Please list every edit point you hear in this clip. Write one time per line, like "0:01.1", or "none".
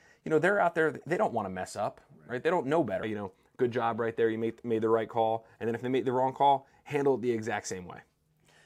0:03.0